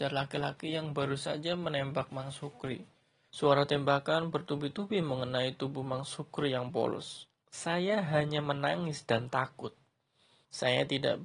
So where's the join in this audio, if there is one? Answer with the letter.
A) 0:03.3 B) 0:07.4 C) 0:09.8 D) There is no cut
A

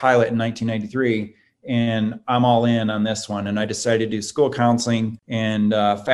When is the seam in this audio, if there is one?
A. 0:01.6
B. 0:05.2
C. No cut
B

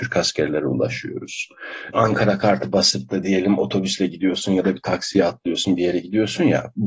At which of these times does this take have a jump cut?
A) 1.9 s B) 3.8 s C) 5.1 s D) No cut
A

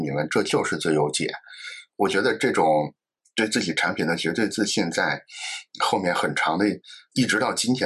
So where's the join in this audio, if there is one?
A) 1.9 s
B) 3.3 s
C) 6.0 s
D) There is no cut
D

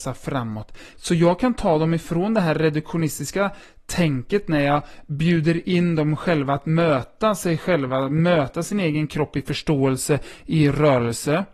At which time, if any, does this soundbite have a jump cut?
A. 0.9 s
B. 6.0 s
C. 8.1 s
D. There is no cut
A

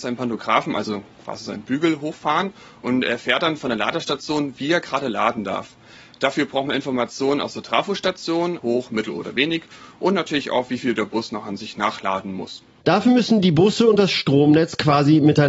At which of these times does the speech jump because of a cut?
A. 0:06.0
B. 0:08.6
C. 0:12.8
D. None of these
B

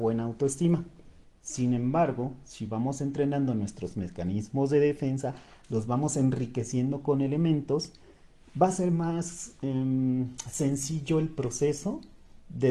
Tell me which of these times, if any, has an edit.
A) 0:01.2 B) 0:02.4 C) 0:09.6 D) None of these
A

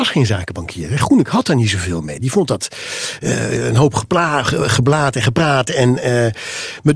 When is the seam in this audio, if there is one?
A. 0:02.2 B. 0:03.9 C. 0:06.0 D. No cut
D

